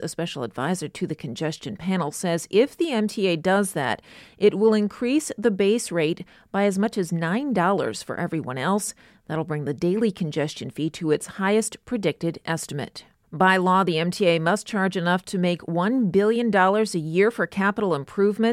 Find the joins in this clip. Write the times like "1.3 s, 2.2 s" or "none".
13.2 s